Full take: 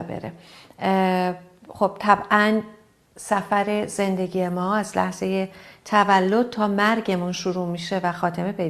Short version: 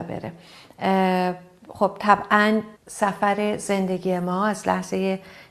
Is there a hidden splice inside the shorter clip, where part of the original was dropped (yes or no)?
yes